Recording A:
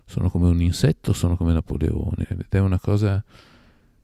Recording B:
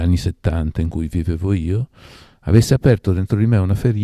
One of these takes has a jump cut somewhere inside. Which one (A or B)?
A